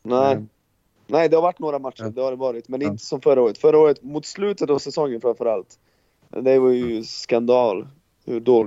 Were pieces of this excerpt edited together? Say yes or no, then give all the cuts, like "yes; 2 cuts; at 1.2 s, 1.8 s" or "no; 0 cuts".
no; 0 cuts